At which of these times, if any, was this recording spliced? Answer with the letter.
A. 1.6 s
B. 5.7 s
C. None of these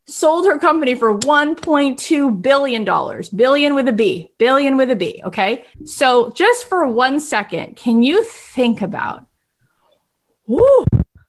B